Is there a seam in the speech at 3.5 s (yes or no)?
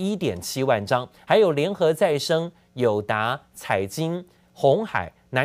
no